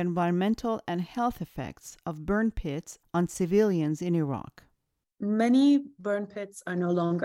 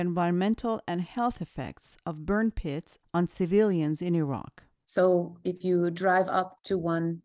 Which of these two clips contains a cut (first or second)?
second